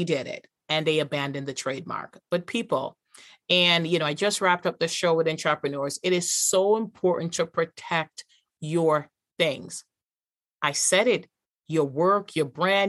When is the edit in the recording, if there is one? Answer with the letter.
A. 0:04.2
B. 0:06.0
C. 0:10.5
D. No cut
D